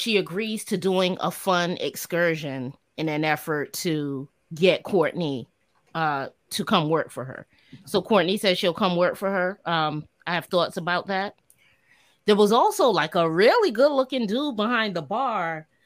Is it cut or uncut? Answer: uncut